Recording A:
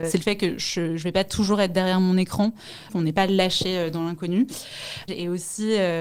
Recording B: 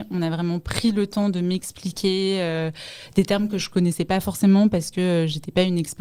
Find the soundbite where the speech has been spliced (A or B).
A